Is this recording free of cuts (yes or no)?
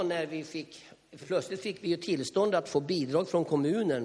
yes